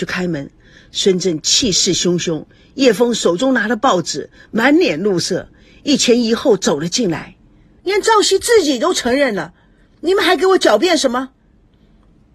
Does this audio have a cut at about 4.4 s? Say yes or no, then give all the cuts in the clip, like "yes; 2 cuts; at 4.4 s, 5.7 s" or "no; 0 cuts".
no; 1 cut; at 7.8 s